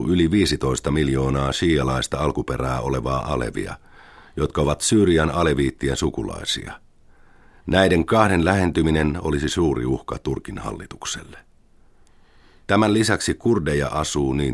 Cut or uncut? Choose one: uncut